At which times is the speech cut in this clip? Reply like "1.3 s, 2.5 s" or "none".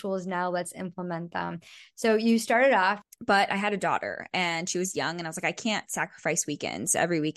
3.0 s